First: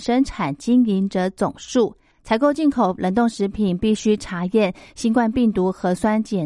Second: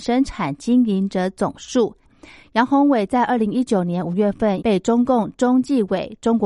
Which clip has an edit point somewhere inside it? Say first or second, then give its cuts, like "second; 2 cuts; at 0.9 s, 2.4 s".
second; 2 cuts; at 2.0 s, 4.6 s